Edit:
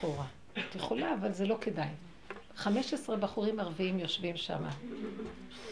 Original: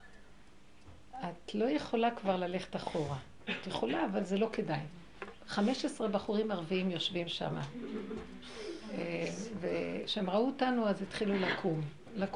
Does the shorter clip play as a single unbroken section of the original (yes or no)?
yes